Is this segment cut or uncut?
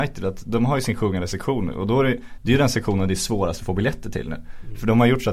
uncut